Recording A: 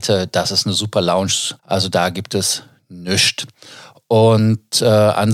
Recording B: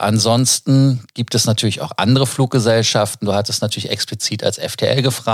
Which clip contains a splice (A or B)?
A